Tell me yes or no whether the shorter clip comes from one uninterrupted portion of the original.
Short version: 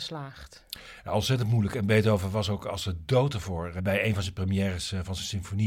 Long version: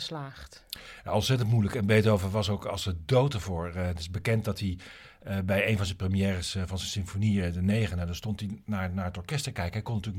no